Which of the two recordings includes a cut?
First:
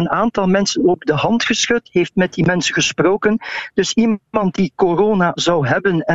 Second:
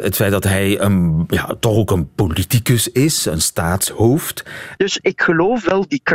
second; 1 cut; at 4.8 s

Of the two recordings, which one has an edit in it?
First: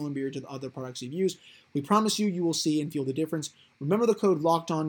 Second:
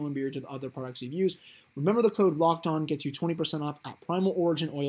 second; 1 cut; at 1.7 s

